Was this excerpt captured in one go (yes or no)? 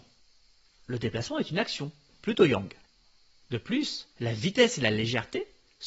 no